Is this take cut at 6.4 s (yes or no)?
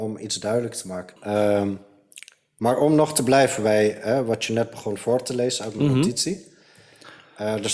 no